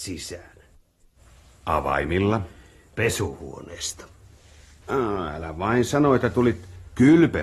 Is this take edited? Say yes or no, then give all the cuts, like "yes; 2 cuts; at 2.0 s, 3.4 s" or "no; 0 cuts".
yes; 2 cuts; at 2.9 s, 4.8 s